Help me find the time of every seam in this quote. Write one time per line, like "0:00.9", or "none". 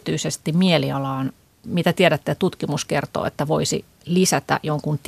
0:01.6